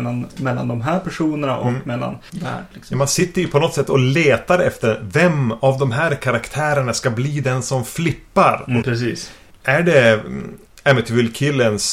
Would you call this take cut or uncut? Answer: cut